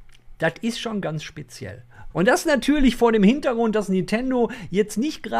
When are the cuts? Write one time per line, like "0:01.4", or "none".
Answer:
0:02.1